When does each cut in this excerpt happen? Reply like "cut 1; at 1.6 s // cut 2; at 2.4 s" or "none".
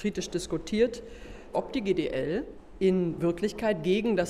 cut 1; at 1.5 s